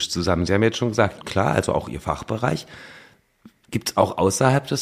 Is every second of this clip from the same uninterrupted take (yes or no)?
no